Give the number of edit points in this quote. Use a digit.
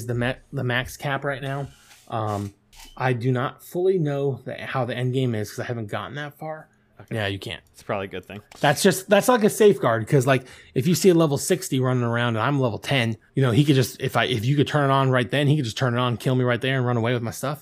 2